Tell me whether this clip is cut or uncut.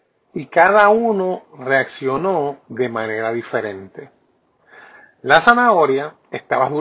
uncut